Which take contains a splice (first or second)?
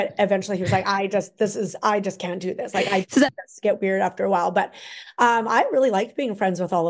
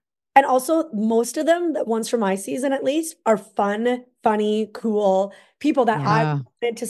first